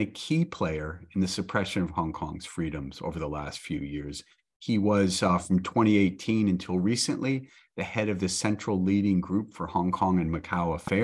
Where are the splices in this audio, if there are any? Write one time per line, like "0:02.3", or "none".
none